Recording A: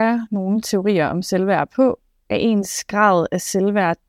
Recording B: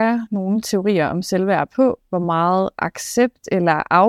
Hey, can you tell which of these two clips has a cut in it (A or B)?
B